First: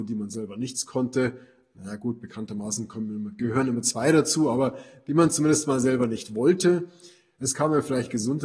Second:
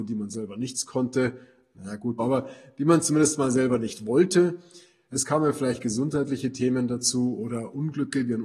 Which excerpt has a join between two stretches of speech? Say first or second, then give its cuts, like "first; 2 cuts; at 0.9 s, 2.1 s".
second; 1 cut; at 2.2 s